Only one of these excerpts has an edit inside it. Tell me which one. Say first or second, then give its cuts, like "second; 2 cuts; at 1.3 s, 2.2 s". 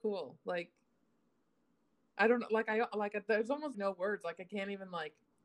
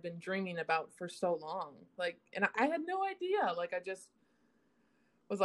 first; 1 cut; at 3.7 s